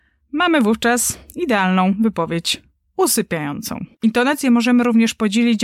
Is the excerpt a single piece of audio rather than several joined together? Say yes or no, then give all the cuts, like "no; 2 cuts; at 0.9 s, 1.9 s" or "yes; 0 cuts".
no; 1 cut; at 3.9 s